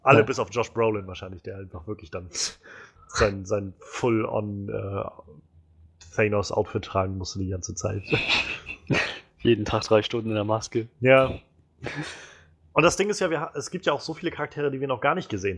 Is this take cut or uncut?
uncut